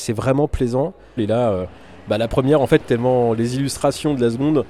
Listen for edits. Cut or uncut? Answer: cut